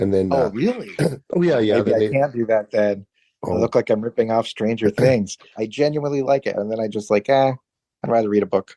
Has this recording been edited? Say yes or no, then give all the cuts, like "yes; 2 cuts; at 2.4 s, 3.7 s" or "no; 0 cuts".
yes; 1 cut; at 5.5 s